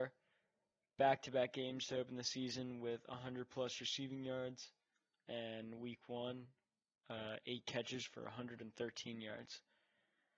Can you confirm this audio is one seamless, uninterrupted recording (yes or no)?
no